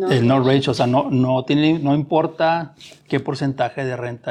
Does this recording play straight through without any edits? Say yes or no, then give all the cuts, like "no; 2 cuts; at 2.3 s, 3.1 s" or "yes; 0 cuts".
no; 1 cut; at 3.0 s